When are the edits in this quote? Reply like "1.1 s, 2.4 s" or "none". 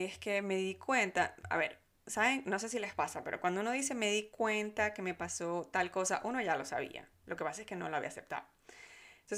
none